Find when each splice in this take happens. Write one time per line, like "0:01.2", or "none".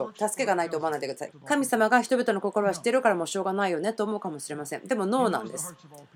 0:01.3